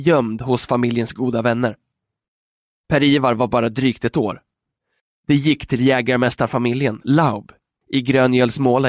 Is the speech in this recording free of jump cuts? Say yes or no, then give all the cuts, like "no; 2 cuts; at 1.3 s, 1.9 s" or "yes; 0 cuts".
no; 1 cut; at 5.2 s